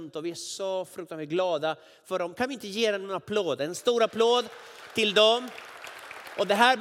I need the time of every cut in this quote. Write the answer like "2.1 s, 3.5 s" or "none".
none